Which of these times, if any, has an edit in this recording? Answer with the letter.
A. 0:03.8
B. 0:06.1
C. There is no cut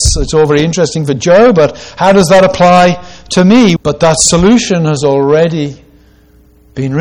A